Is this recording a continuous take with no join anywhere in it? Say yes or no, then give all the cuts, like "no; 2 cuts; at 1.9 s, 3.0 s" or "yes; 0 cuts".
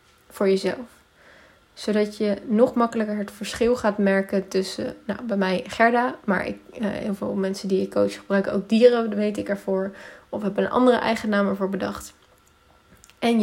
yes; 0 cuts